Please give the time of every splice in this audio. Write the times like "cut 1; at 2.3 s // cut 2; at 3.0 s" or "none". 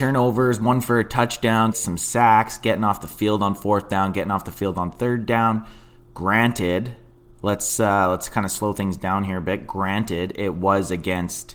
cut 1; at 1.7 s